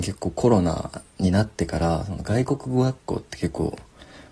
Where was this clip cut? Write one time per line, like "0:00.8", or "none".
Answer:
none

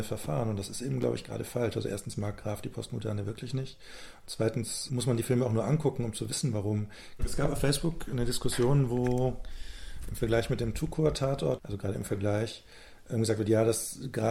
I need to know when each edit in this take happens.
0:04.9
0:07.2
0:11.6

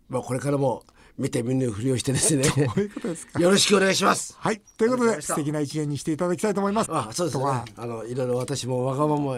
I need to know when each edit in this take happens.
0:06.8

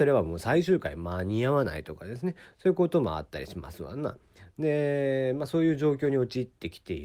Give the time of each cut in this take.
none

